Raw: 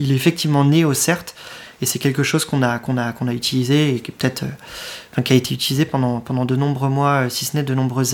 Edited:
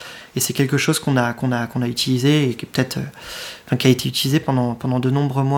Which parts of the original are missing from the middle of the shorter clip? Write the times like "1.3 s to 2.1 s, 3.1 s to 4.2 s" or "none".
none